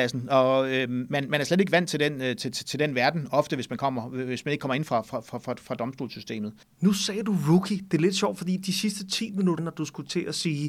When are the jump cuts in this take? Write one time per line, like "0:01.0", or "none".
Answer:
0:06.6
0:09.6

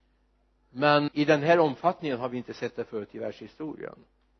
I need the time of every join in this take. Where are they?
0:01.1

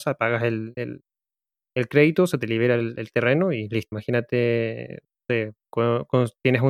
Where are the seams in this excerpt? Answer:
0:03.9

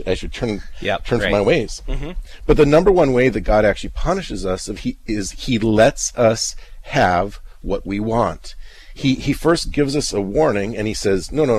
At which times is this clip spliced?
none

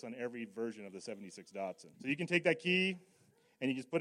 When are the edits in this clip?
0:01.9

